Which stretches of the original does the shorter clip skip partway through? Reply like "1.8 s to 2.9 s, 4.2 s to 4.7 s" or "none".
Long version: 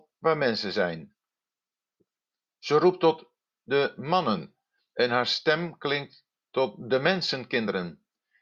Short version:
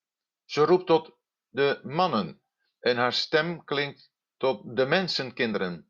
none